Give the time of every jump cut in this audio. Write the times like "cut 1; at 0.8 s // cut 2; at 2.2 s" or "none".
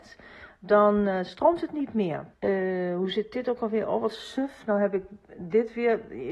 cut 1; at 2.3 s